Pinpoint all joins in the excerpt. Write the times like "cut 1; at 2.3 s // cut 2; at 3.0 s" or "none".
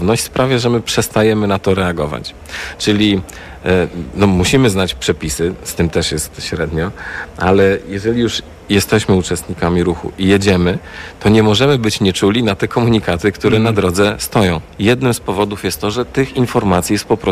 cut 1; at 14.7 s